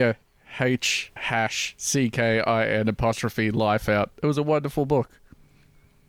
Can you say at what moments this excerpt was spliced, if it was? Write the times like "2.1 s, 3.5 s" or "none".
1.2 s